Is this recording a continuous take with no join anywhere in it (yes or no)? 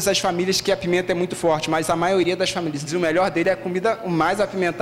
no